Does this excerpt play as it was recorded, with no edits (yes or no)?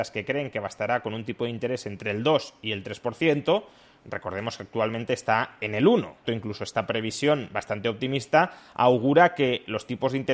no